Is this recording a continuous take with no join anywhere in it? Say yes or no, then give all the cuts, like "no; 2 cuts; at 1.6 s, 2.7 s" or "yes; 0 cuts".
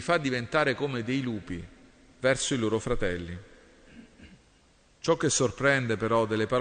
yes; 0 cuts